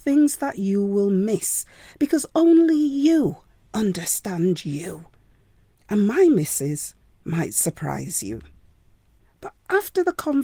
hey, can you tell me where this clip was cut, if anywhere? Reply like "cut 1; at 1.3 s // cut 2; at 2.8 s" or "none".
cut 1; at 9.2 s